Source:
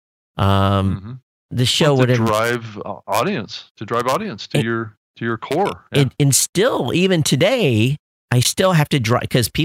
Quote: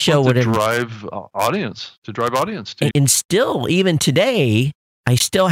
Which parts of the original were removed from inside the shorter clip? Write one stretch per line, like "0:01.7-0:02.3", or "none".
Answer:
0:04.6-0:06.2

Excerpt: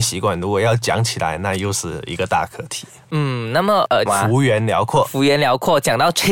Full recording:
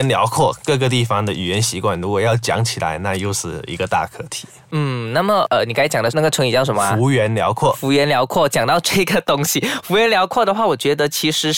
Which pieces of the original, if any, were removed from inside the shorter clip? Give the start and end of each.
0:05.7-0:06.7

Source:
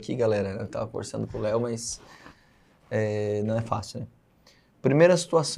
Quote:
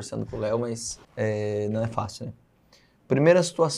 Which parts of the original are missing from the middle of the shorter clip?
0:02.1-0:02.8

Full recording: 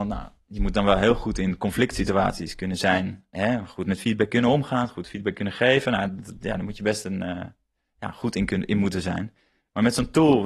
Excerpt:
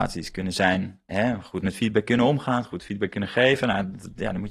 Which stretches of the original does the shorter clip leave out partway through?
none

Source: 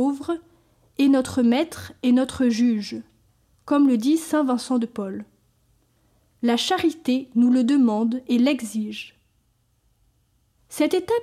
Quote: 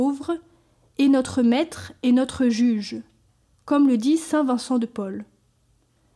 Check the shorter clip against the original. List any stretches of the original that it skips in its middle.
none

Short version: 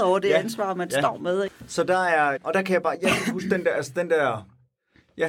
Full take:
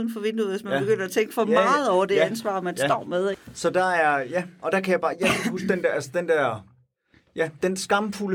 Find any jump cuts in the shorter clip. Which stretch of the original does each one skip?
0:04.2-0:04.5

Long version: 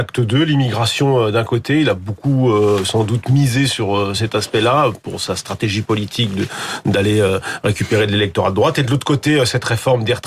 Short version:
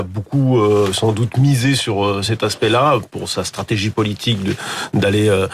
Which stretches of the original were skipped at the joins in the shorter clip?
none

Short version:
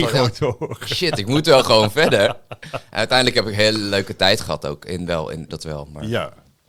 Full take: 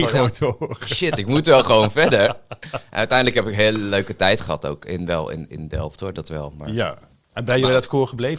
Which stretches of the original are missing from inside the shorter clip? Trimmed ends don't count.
0:05.5-0:06.1

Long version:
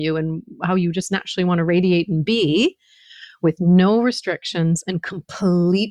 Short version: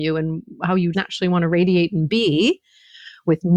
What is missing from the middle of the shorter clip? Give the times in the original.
0:00.9-0:01.1

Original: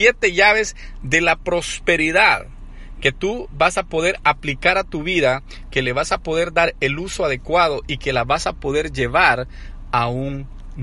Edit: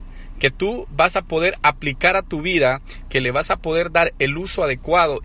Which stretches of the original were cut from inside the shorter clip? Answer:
none

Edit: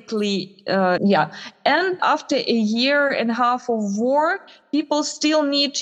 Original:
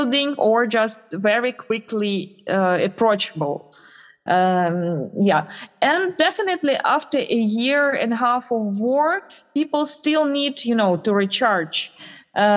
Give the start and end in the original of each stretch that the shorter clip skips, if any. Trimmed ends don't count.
0:02.8-0:05.1
0:06.2-0:06.8

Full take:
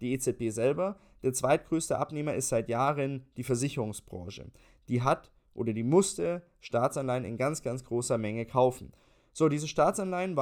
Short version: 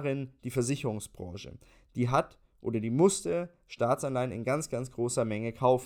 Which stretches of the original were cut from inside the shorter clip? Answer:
none

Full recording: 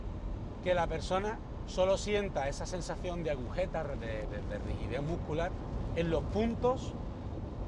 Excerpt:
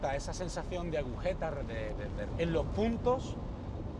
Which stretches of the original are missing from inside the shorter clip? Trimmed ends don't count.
0:04.6-0:05.9

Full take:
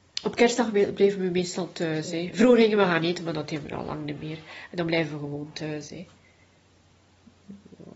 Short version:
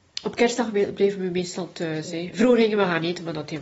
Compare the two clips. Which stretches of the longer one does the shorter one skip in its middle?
none

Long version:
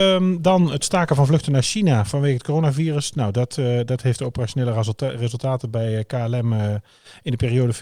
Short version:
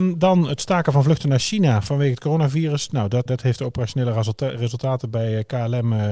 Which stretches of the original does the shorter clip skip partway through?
0:03.5-0:03.9

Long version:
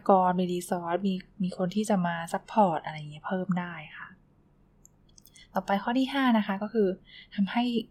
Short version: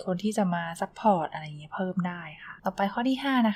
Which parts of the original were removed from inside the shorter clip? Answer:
0:04.1-0:05.5

